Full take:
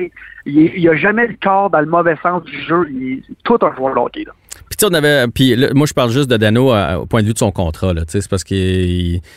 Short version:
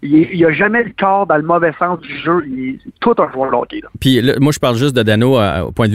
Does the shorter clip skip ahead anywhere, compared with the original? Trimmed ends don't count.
yes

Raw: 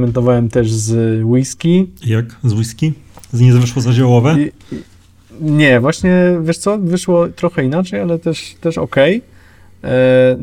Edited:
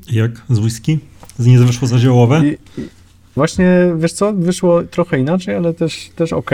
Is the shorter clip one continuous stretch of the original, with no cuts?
no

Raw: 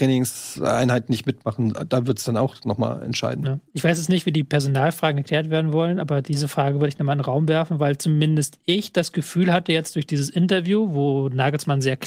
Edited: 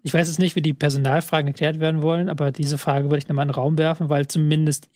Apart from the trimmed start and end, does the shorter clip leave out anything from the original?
no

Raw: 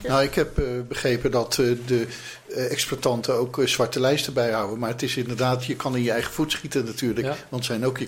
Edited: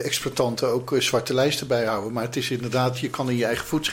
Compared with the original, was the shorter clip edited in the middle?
no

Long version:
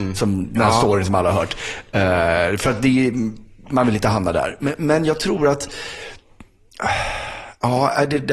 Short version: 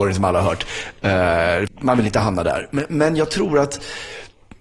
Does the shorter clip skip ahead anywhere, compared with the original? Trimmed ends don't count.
yes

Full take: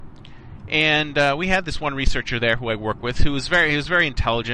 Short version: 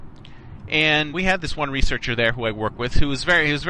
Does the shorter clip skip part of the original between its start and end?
yes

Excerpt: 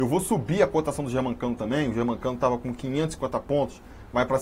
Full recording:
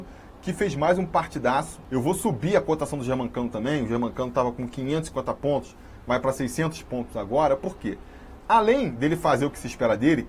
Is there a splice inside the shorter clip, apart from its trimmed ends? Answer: no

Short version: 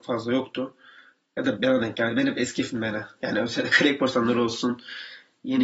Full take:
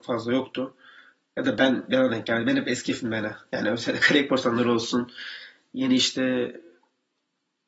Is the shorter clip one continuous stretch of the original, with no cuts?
no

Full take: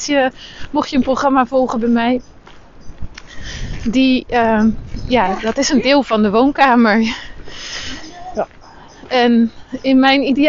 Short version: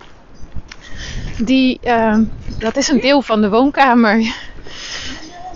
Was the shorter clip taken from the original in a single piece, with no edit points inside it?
no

